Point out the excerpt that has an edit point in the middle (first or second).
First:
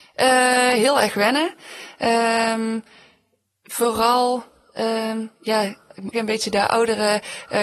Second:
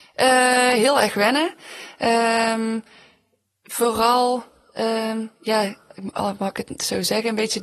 first